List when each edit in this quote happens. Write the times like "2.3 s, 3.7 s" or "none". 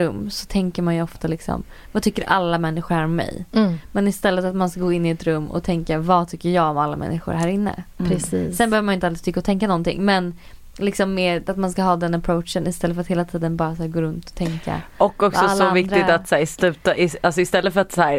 none